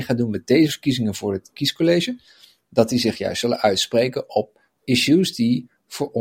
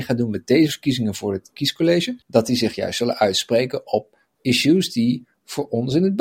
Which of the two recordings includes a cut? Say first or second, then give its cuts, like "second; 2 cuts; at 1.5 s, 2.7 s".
second; 1 cut; at 2.2 s